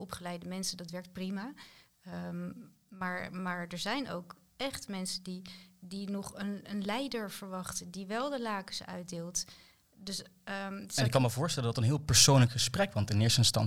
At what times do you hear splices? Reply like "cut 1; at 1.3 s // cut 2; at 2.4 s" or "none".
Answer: none

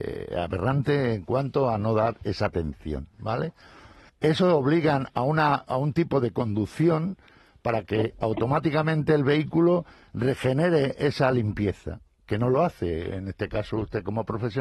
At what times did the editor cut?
cut 1; at 4.1 s

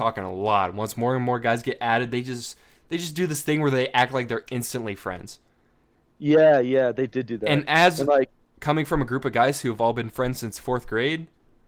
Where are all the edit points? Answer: none

